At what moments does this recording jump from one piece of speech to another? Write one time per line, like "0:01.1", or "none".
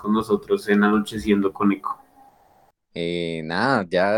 0:02.9